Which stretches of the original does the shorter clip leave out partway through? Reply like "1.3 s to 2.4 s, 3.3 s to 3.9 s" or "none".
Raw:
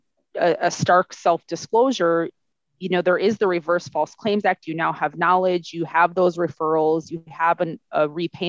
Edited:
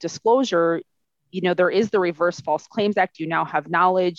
none